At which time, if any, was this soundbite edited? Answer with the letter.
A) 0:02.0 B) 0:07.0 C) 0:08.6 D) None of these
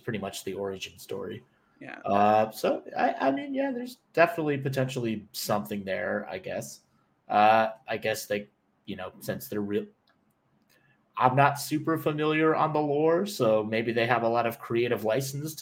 D